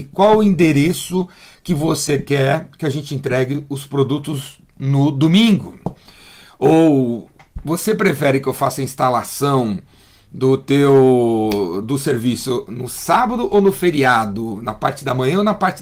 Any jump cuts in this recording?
yes; 1 cut; at 11.8 s

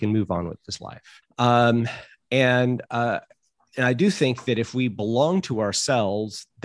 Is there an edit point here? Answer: yes; 1 cut; at 1.2 s

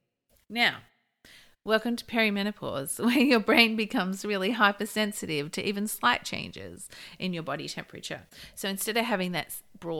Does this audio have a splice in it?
no; 0 cuts

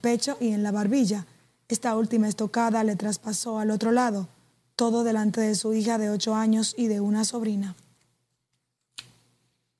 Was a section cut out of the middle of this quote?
no; 0 cuts

